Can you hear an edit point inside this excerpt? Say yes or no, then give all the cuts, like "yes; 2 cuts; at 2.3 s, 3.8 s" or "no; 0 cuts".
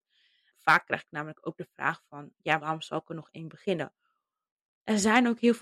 yes; 1 cut; at 2.6 s